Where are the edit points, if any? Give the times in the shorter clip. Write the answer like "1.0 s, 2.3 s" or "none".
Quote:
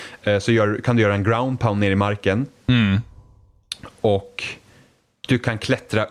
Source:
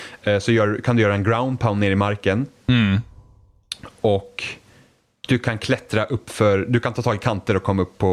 none